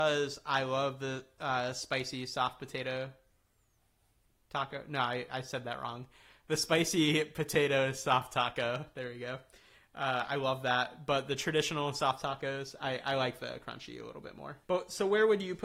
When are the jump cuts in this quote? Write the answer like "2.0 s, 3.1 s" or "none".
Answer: 14.6 s